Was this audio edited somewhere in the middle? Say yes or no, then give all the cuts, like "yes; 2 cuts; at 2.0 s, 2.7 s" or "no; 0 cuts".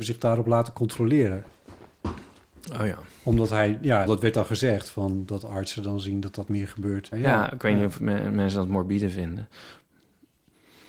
yes; 2 cuts; at 4.1 s, 7.1 s